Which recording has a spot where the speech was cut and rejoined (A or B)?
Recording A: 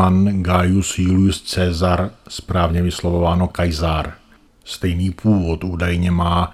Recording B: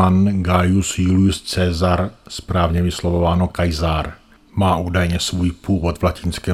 A